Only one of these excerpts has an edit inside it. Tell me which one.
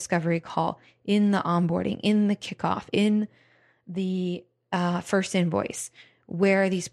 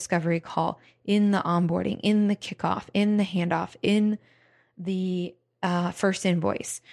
first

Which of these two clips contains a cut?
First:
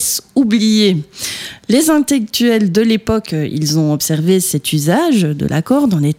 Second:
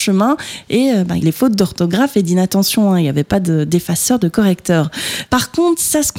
second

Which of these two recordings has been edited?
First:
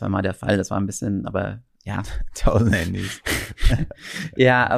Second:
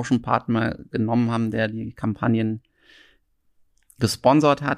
first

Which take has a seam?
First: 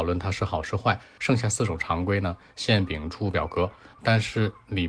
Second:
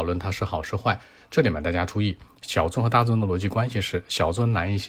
first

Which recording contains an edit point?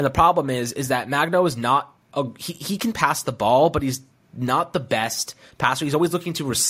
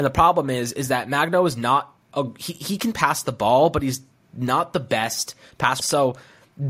second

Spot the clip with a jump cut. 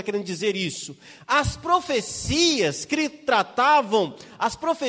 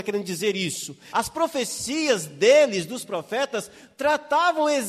second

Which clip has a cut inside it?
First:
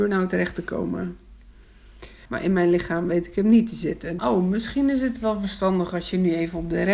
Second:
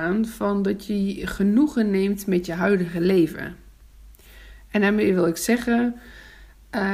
first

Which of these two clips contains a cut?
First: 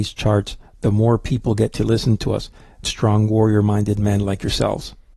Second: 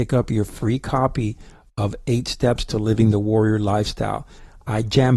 first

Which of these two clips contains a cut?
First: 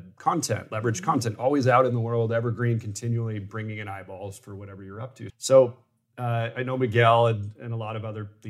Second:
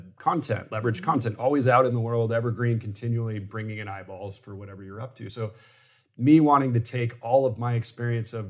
first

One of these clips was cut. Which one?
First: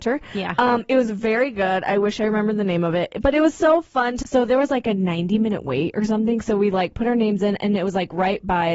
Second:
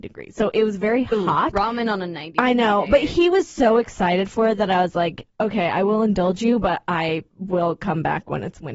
first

